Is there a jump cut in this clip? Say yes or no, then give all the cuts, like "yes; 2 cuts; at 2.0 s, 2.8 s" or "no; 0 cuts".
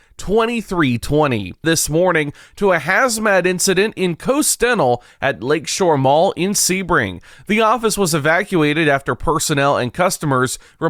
yes; 1 cut; at 1.6 s